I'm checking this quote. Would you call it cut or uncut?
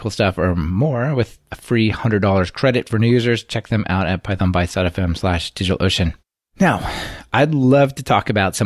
uncut